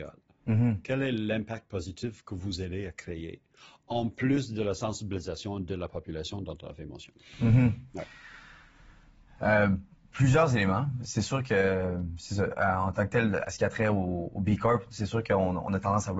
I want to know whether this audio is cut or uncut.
uncut